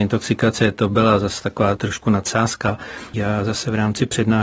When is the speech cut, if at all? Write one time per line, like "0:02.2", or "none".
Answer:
0:01.8
0:03.1